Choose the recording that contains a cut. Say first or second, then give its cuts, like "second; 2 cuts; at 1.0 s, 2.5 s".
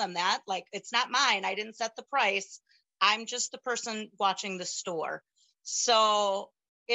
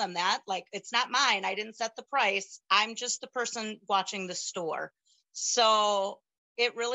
second; 1 cut; at 2.6 s